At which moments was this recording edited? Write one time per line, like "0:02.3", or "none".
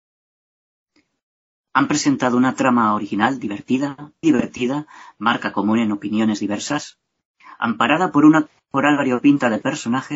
0:04.2